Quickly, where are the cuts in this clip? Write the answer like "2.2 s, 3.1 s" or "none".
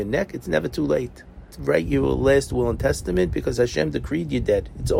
1.5 s